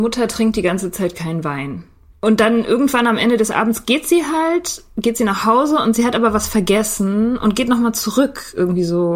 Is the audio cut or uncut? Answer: uncut